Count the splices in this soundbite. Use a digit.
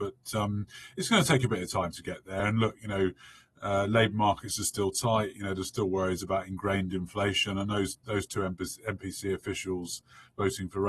0